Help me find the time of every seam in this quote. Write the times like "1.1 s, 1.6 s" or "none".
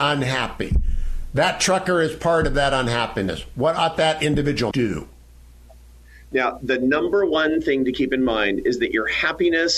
4.7 s